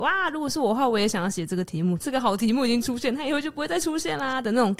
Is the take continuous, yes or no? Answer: no